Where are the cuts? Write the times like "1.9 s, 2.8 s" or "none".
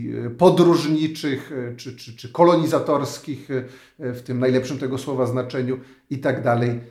2.2 s